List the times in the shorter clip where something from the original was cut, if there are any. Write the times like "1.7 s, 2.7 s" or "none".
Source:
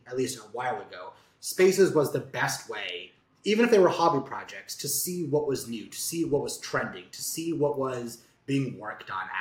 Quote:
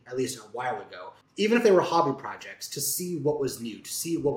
1.2 s